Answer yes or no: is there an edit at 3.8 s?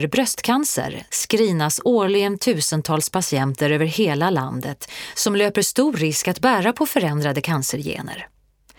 no